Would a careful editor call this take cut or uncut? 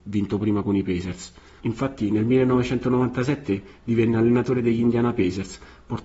cut